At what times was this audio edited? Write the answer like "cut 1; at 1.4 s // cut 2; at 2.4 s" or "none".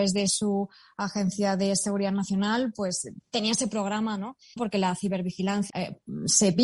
cut 1; at 4.6 s // cut 2; at 5.7 s